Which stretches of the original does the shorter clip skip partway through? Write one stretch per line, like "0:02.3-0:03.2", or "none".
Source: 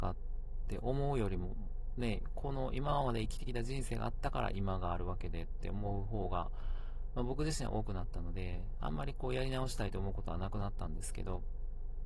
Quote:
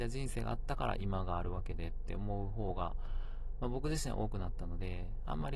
none